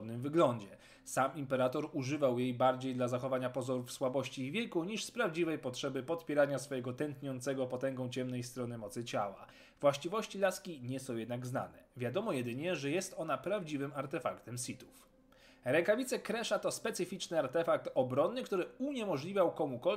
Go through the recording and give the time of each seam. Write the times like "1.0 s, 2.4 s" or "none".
none